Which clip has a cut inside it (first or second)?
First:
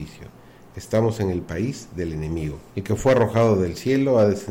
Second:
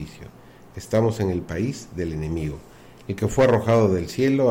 first